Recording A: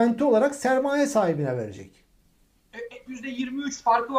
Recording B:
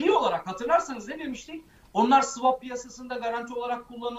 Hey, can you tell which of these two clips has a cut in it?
A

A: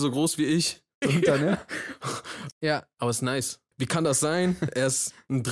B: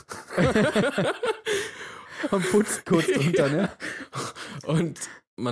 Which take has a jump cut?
A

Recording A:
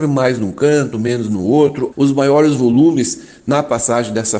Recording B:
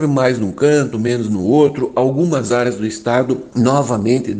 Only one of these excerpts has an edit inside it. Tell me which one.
A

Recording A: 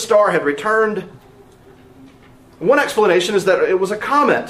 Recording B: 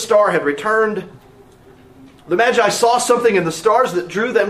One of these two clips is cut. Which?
B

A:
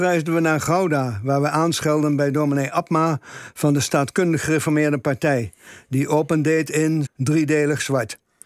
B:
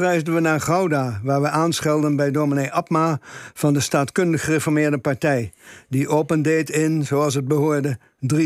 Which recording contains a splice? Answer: A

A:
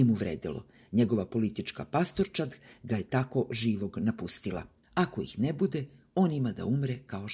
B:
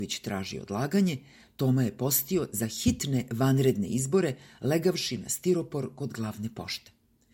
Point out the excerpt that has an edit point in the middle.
A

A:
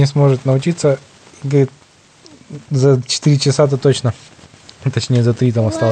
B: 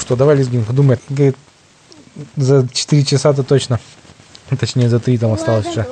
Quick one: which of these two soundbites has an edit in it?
B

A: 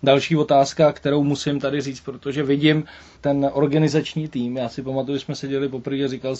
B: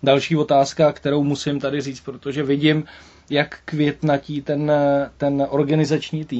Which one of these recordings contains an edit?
A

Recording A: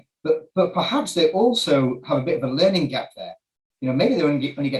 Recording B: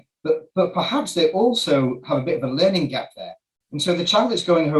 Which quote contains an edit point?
B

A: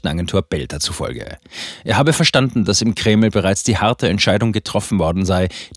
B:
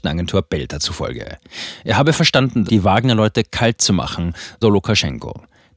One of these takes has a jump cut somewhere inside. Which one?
B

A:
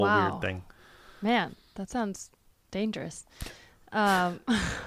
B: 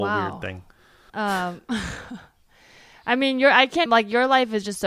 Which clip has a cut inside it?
B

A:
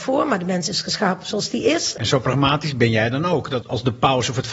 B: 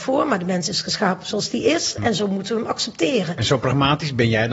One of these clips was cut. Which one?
A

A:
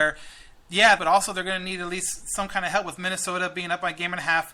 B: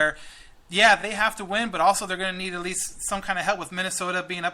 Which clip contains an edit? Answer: A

